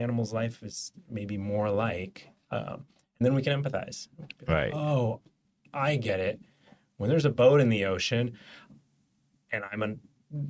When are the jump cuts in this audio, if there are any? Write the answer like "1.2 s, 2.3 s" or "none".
none

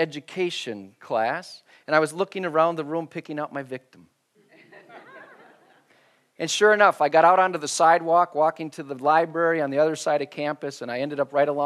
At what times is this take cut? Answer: none

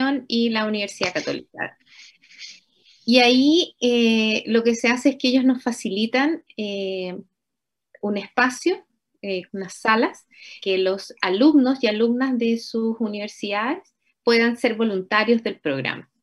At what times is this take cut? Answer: 9.5 s, 10.6 s

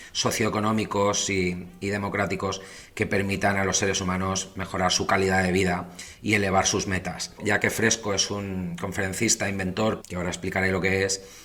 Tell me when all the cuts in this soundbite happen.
7.4 s, 10.0 s

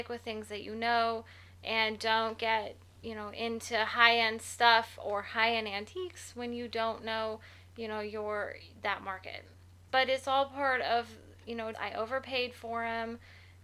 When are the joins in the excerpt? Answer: 9.9 s, 11.7 s

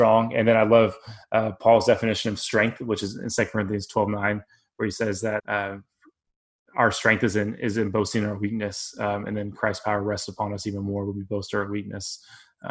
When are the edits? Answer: 5.4 s

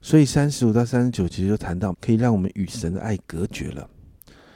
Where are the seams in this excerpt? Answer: 1.9 s

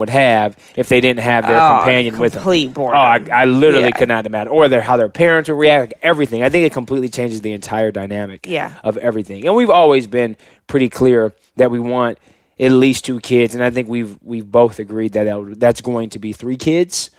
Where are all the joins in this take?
none

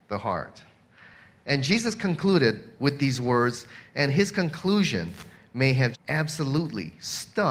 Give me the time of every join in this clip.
5.9 s

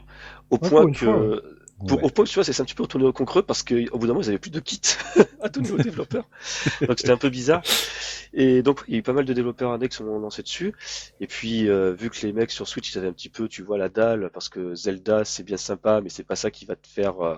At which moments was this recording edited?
none

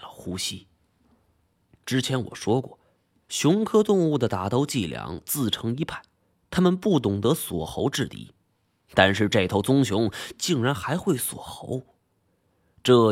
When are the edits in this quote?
1.8 s

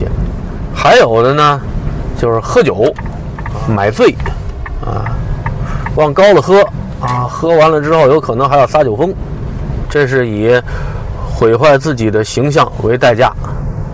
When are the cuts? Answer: 9.9 s

